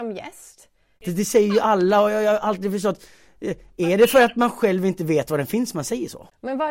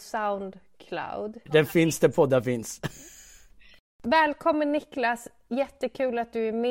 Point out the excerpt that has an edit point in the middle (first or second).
first